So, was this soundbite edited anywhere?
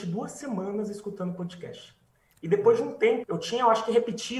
yes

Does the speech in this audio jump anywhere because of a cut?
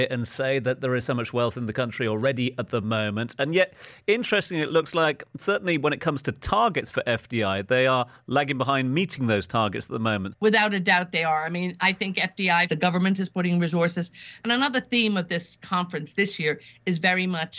yes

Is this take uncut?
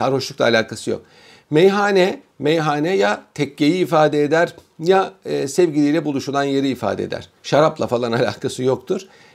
no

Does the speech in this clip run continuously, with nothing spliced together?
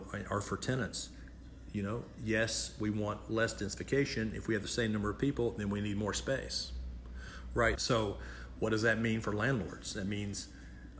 no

